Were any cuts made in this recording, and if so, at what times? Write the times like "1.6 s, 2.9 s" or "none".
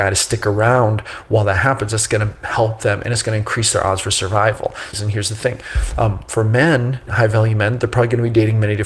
4.9 s, 7.1 s